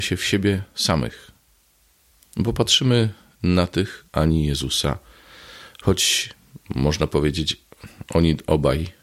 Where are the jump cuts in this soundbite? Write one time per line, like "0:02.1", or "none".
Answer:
0:02.2
0:04.1